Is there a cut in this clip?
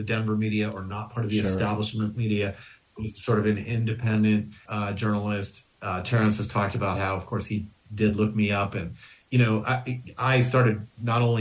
no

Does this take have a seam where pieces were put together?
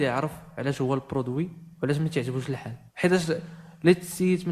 yes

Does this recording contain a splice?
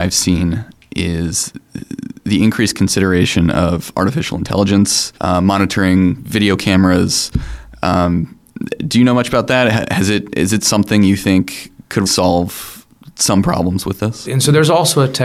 yes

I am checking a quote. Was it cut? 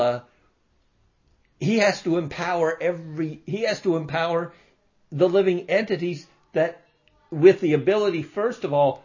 no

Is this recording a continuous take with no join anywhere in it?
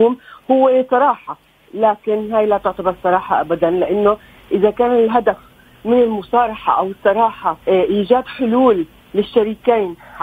no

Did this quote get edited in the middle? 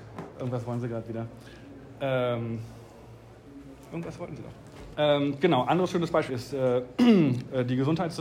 yes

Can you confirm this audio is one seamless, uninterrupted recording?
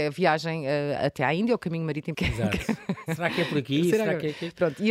no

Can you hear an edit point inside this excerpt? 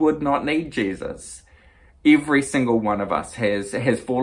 no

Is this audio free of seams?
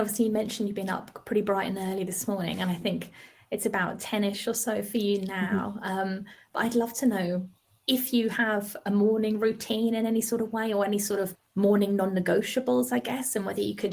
yes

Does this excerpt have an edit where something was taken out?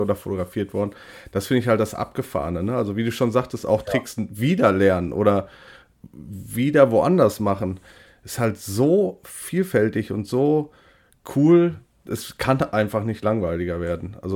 no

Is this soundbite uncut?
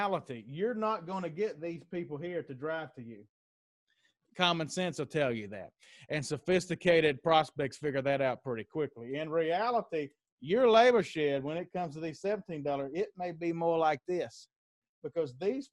yes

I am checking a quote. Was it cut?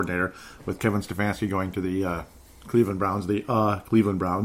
no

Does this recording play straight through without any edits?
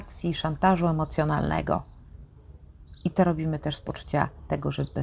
yes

